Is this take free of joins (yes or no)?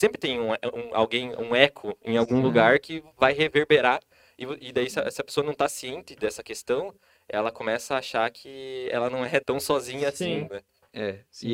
no